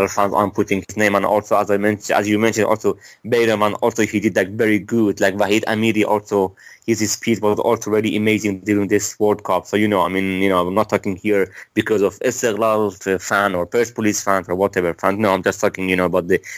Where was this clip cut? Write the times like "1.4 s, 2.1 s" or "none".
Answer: none